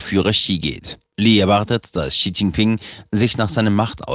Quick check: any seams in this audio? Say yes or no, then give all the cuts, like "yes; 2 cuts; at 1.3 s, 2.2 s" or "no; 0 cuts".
yes; 1 cut; at 1.1 s